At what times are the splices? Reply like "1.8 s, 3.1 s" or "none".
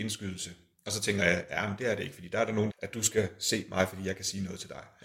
2.7 s